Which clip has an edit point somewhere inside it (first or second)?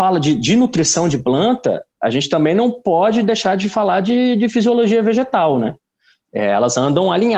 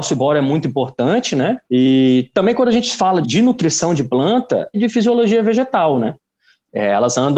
second